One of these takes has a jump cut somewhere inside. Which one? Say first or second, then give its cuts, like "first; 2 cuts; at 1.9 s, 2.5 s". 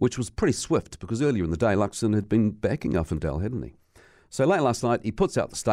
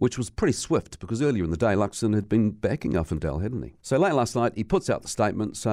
second; 1 cut; at 3.8 s